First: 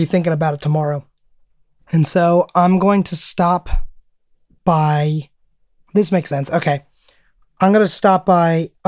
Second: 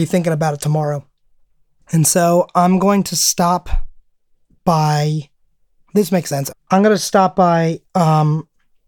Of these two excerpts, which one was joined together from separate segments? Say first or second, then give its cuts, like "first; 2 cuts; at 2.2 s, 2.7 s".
second; 1 cut; at 6.5 s